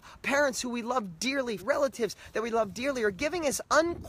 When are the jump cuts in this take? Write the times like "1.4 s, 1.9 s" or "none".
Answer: 1.6 s

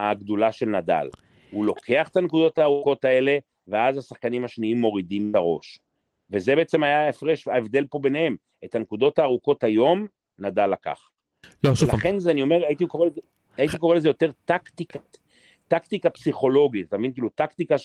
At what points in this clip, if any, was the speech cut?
none

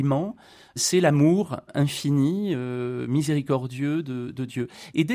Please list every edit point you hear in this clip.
none

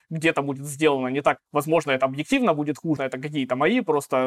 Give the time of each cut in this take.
1.4 s, 3.0 s

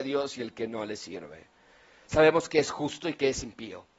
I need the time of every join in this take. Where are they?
2.0 s

